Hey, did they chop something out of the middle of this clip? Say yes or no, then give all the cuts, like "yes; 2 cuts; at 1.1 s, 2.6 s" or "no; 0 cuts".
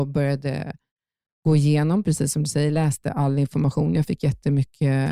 no; 0 cuts